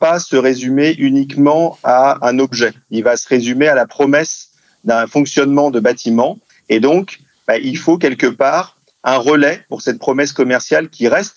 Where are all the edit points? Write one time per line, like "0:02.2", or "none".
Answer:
0:06.5